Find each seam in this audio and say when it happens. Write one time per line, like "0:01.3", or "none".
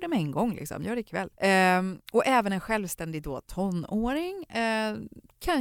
0:01.3